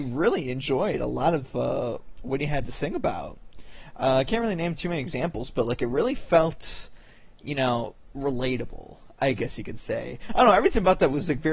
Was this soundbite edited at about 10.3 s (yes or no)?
yes